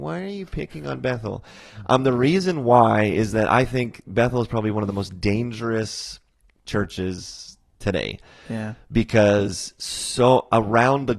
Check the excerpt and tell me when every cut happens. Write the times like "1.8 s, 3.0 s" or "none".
none